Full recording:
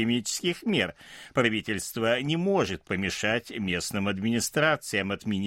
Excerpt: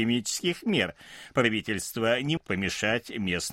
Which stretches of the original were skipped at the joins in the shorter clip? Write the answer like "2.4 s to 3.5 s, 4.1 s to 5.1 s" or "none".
2.4 s to 2.8 s